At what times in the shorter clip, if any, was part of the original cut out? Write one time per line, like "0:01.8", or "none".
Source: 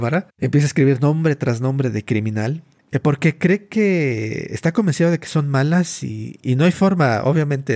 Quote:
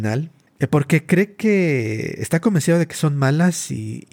none